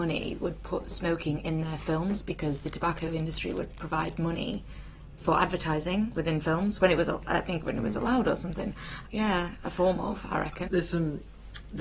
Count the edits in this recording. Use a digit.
2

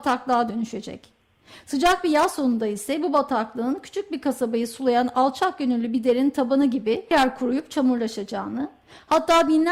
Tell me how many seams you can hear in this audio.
1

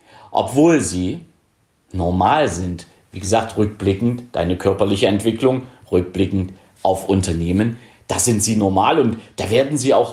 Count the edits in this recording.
0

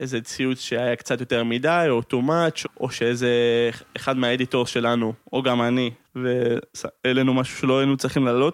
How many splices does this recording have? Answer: 2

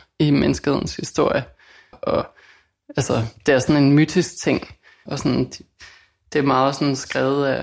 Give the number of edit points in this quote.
2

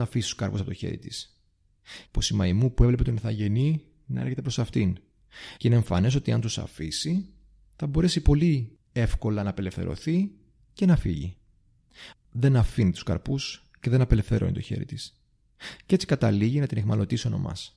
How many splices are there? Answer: 3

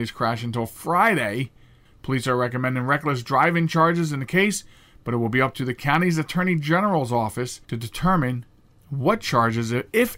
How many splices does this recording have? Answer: 2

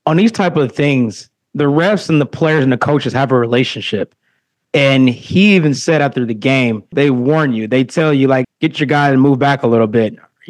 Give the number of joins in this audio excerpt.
2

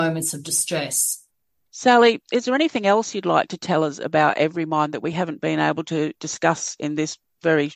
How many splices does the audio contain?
1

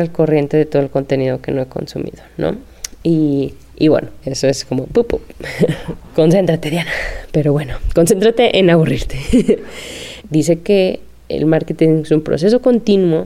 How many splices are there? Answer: 1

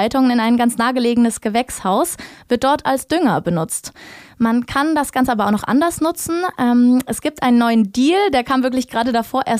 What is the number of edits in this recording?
0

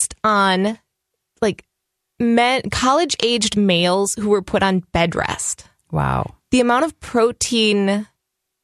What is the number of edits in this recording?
0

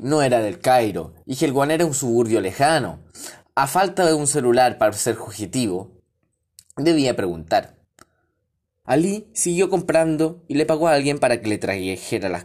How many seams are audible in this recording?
1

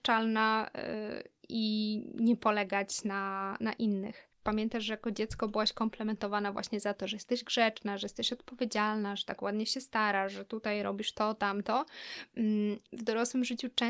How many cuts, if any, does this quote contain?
2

